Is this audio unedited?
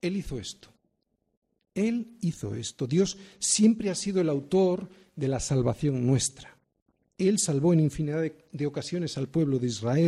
yes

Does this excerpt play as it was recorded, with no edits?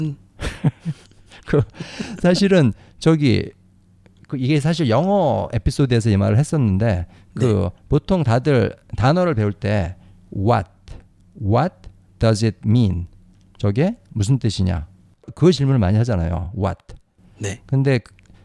yes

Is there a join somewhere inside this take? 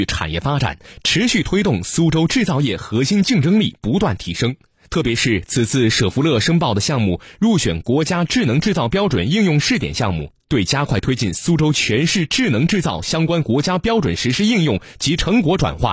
no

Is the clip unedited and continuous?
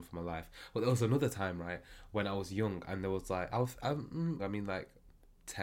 no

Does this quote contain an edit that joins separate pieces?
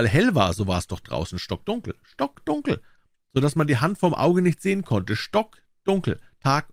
no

